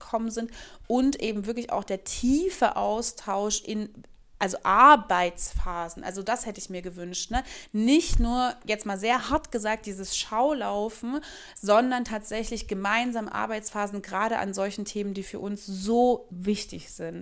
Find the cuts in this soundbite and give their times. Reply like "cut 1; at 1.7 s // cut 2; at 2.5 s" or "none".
cut 1; at 16.3 s